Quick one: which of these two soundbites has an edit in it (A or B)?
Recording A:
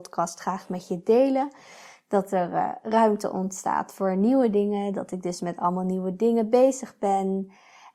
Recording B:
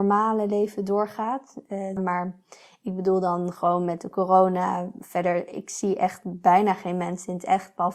B